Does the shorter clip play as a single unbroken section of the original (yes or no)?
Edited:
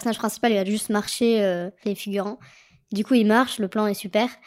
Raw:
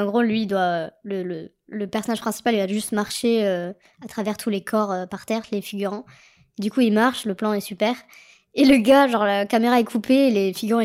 no